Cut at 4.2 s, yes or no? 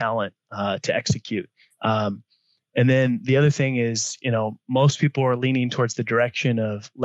no